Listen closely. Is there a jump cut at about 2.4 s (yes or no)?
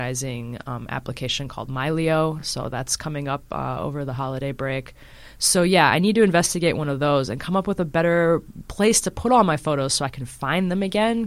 no